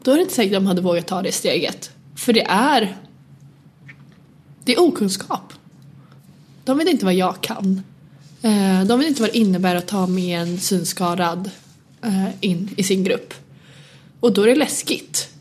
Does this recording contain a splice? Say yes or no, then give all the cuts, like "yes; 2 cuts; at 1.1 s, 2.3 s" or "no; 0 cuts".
no; 0 cuts